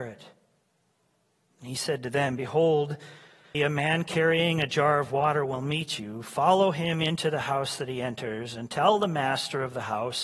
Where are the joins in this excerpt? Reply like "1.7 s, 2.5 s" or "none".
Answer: 3.5 s